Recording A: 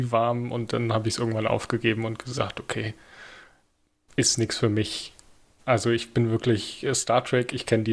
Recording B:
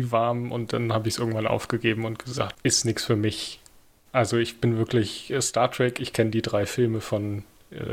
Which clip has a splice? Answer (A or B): B